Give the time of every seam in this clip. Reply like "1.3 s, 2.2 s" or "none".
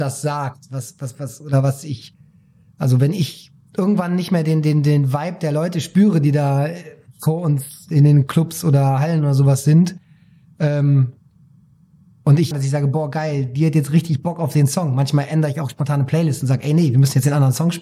12.5 s